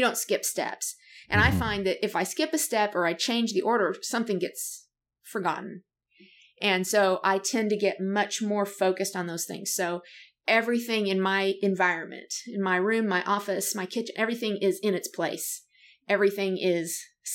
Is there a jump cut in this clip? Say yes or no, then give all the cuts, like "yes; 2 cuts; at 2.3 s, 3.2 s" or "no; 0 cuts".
no; 0 cuts